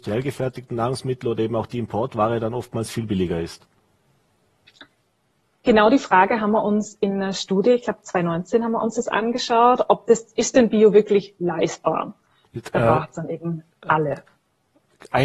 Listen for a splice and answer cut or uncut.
cut